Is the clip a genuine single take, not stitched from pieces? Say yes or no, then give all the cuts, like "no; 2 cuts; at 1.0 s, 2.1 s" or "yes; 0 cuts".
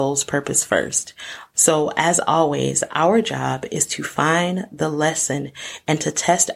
no; 1 cut; at 1.5 s